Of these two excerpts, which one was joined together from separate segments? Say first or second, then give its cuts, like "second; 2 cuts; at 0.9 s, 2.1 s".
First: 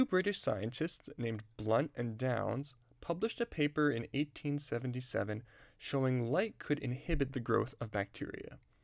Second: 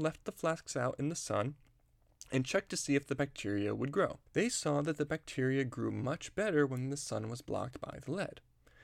second; 1 cut; at 4.3 s